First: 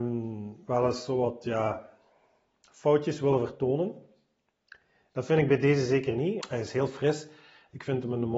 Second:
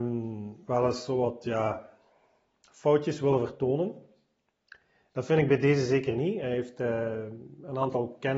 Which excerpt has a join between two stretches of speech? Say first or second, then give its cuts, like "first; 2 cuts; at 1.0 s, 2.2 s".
first; 1 cut; at 6.4 s